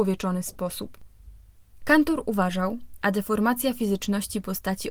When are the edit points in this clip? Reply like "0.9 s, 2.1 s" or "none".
1.8 s, 3.0 s